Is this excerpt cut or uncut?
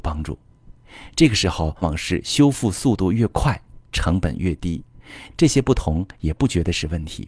cut